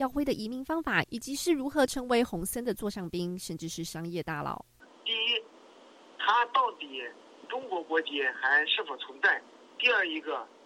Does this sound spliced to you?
no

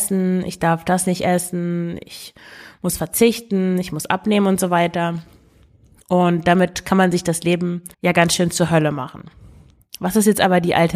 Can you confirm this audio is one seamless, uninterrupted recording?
no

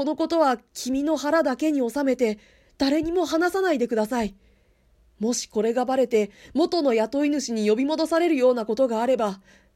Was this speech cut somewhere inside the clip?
no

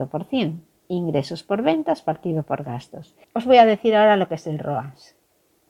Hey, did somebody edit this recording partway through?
yes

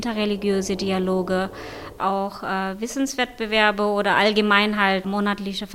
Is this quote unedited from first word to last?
yes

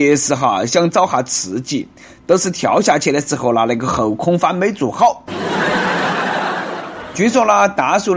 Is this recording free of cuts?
yes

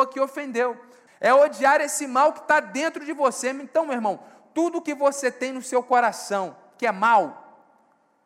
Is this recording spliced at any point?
yes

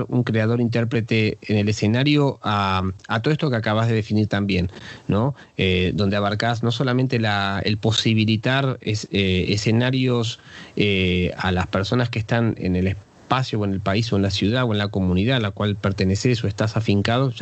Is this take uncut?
yes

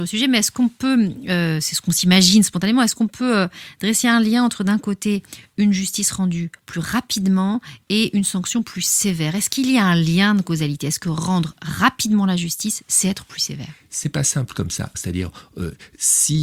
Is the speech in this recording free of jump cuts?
no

